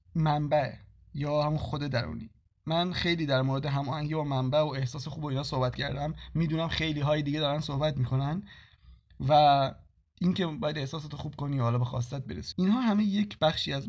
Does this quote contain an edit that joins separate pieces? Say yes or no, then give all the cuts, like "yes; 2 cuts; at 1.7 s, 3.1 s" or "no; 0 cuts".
yes; 1 cut; at 12.5 s